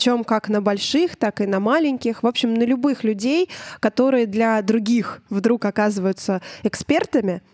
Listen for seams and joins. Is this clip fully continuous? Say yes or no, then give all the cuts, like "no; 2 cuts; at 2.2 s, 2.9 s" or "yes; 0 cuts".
yes; 0 cuts